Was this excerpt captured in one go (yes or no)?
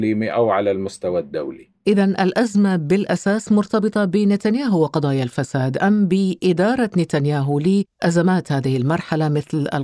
yes